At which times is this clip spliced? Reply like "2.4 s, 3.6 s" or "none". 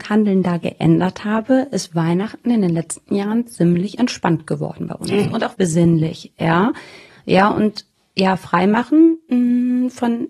5.5 s, 7.1 s